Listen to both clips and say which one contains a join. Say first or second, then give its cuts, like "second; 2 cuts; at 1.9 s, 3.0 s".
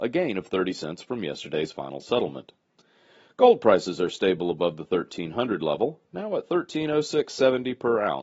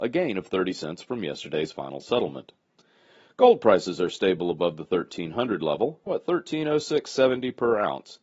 second; 1 cut; at 6.1 s